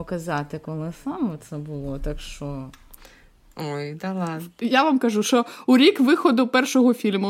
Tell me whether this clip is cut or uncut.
uncut